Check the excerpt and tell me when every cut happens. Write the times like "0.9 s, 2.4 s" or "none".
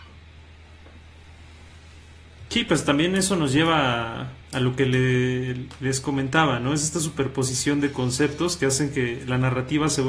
4.4 s